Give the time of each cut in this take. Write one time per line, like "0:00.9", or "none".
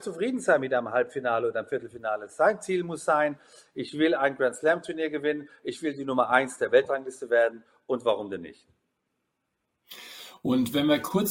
none